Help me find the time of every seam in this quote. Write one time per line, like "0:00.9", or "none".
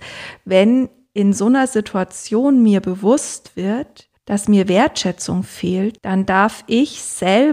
0:04.2
0:06.0

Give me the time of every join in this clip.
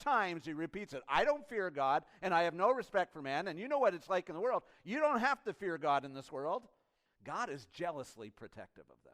0:07.1

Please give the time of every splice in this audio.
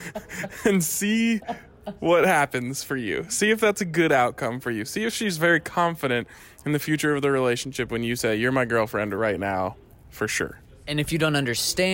none

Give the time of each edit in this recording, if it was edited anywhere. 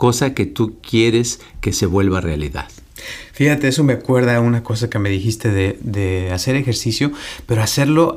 0:05.8

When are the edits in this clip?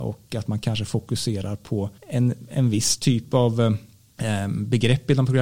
0:02.0

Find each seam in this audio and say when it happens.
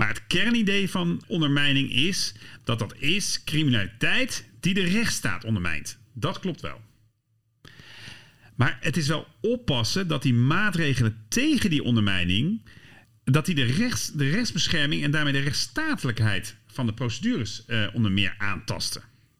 0:01.2

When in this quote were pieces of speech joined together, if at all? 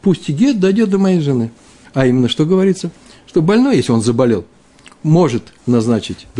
0:01.8

